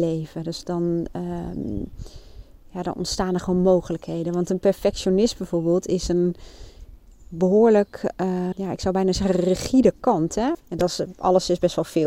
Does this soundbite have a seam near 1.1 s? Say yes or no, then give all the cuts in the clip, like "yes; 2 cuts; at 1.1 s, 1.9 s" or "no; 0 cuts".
no; 2 cuts; at 8.5 s, 10.5 s